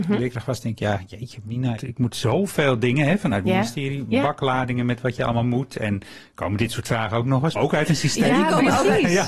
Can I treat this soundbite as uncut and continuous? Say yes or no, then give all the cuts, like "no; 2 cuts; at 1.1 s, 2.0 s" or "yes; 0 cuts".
no; 2 cuts; at 1.8 s, 7.6 s